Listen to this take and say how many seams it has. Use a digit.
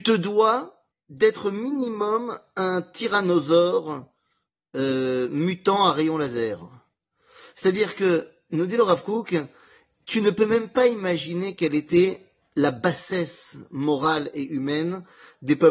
0